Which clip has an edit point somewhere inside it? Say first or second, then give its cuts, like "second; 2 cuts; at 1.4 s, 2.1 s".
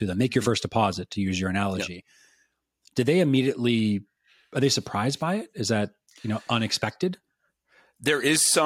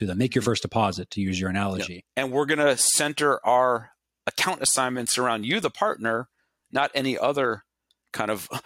second; 1 cut; at 2.0 s